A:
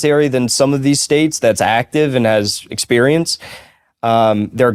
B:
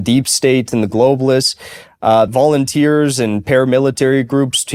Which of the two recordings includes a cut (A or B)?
B